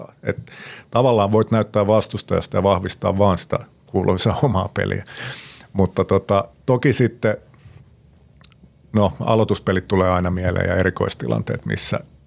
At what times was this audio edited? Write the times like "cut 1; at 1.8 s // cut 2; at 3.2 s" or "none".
none